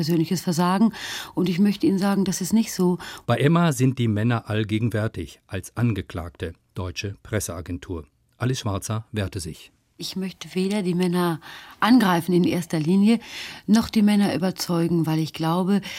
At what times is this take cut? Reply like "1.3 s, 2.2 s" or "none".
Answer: 3.2 s